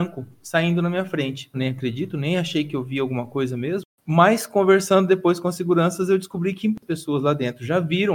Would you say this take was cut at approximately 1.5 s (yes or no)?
yes